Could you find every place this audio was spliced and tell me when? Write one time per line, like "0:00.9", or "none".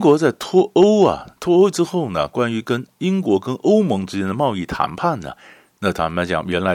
none